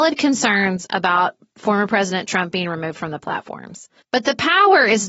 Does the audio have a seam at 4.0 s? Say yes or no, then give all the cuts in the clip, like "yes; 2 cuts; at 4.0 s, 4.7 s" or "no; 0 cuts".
yes; 1 cut; at 4.0 s